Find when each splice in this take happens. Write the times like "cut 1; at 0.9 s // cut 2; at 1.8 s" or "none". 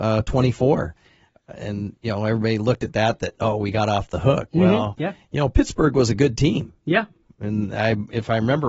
none